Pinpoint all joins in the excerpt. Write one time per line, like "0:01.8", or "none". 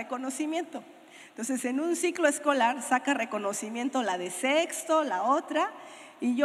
none